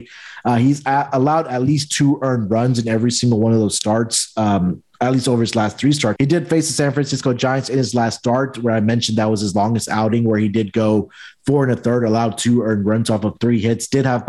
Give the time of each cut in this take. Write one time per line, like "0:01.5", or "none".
0:06.2